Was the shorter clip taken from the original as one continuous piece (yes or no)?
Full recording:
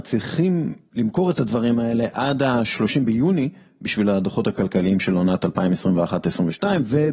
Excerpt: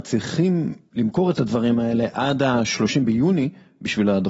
yes